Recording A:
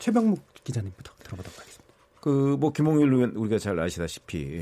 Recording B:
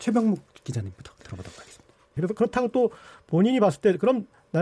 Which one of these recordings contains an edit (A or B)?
B